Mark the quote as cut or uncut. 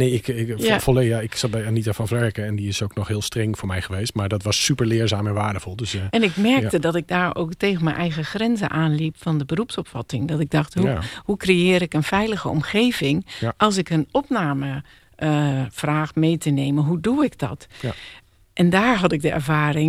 uncut